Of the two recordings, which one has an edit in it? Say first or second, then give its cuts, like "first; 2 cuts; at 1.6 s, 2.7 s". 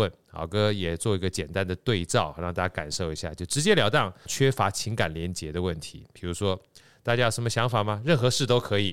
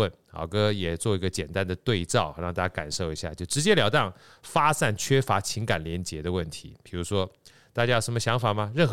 first; 1 cut; at 4.3 s